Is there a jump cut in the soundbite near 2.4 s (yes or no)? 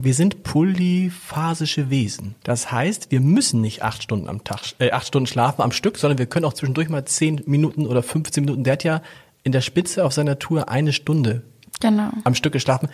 yes